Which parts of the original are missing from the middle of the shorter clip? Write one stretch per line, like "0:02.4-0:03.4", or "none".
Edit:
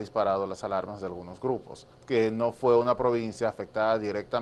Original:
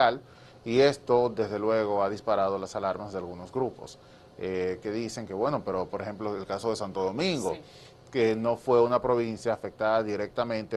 0:04.1-0:08.0